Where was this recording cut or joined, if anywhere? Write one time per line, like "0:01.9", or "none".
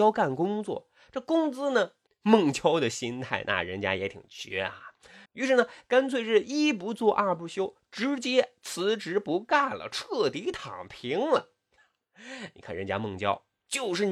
0:02.1
0:05.3